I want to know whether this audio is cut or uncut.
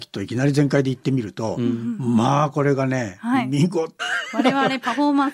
cut